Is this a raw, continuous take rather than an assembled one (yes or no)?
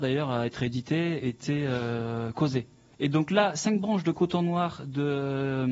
no